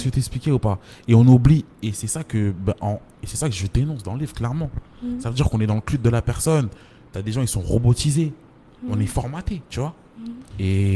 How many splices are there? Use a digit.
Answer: 0